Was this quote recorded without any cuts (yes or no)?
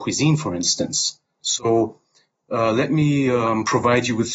yes